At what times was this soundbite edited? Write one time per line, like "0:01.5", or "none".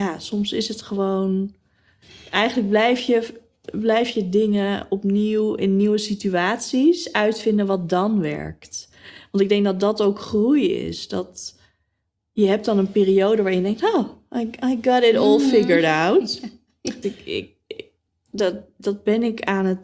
0:17.0

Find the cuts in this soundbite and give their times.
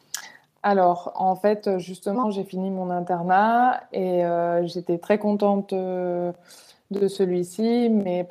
0:01.1

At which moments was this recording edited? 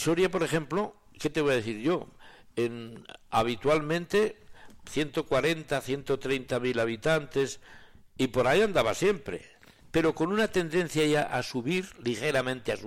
0:09.8

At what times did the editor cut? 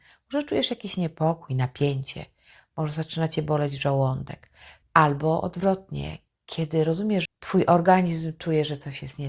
0:04.8
0:07.3

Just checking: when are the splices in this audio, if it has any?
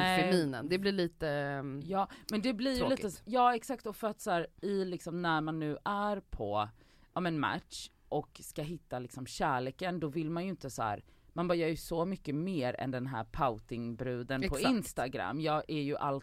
none

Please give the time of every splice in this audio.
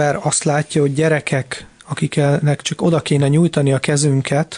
none

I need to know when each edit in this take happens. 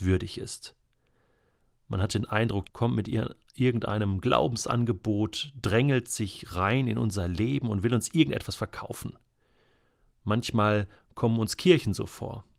0:02.7

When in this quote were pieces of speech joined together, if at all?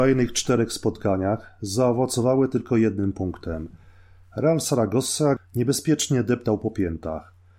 0:05.4

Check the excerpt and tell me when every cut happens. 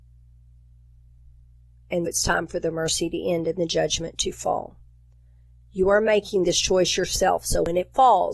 0:02.1

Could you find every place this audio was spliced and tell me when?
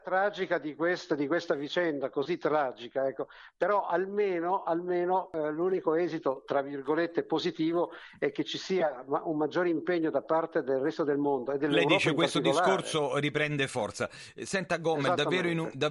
none

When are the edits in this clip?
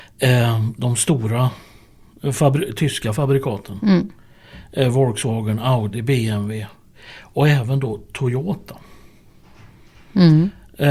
none

